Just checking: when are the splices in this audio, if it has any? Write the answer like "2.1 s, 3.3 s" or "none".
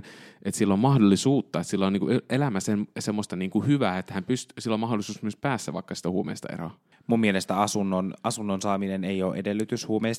6.9 s